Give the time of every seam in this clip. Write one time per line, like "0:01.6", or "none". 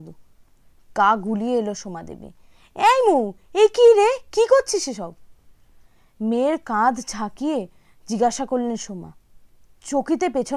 none